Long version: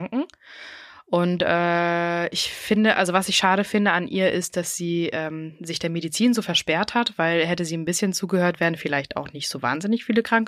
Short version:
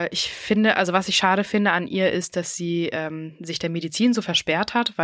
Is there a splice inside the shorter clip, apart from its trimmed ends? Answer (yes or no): no